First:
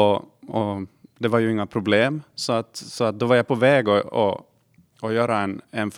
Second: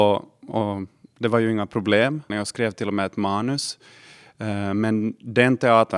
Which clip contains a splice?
second; 1 cut; at 2.3 s

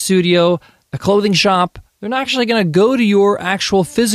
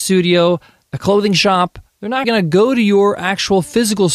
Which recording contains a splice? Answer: second; 1 cut; at 2.2 s

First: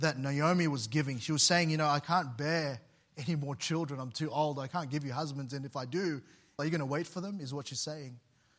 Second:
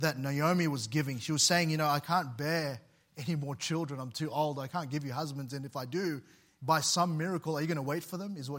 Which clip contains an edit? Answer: first; 1 cut; at 6.6 s

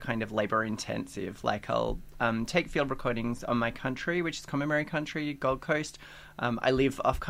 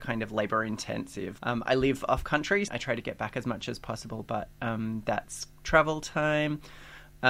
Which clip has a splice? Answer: second; 2 cuts; at 1.4 s, 2.7 s

